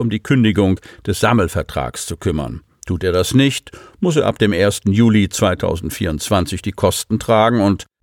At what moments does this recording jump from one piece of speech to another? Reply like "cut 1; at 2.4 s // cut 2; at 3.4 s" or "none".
none